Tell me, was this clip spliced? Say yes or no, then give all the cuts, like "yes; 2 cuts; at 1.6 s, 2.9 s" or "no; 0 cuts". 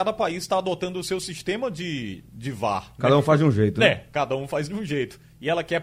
no; 0 cuts